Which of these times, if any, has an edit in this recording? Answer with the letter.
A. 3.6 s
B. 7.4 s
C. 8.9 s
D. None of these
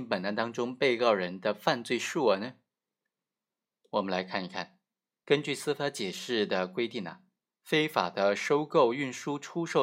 D